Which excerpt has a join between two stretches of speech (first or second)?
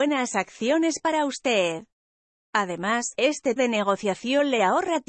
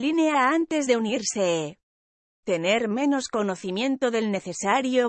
first